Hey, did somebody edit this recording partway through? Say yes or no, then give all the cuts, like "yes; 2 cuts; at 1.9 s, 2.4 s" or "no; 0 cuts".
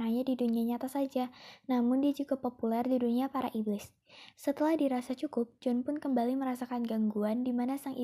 no; 0 cuts